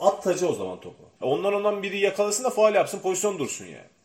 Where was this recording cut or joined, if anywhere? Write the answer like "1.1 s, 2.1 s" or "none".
1.2 s